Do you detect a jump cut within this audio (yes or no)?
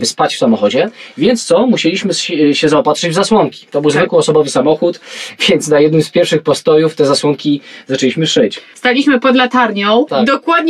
no